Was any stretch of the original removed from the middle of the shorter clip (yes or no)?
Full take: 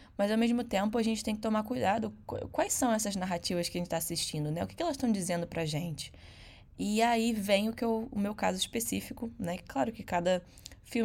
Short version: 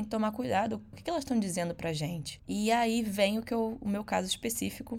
yes